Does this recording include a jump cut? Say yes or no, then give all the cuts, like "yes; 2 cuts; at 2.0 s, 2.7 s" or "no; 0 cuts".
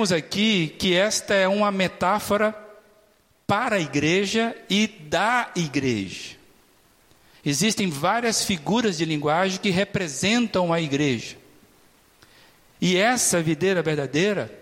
no; 0 cuts